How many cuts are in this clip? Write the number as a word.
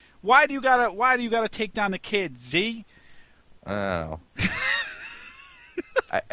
zero